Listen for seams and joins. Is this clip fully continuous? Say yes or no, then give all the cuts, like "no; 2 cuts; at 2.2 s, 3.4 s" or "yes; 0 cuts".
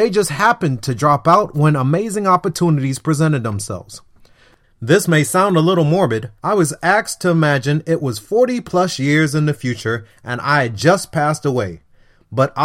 no; 2 cuts; at 4.6 s, 6.4 s